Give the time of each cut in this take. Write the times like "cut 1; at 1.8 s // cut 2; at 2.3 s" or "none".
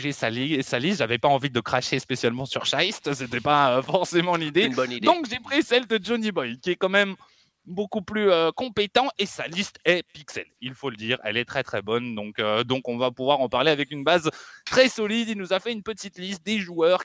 none